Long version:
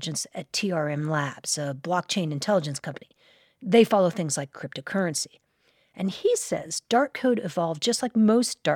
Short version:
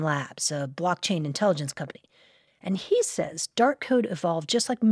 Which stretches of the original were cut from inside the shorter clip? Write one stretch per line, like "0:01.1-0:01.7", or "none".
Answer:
0:03.5-0:05.8